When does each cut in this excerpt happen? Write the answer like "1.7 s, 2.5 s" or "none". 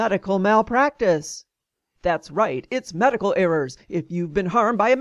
2.0 s